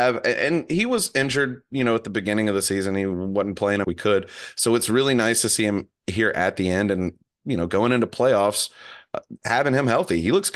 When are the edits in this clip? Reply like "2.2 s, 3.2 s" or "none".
3.8 s